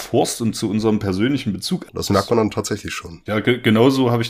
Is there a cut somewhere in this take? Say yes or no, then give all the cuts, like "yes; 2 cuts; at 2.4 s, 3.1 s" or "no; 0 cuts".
yes; 2 cuts; at 1.9 s, 3.3 s